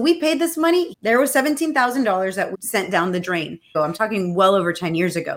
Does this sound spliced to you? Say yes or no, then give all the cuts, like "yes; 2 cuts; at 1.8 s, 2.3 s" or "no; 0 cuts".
yes; 3 cuts; at 0.9 s, 2.5 s, 3.7 s